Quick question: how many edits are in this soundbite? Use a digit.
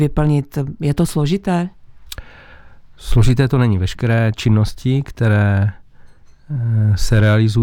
0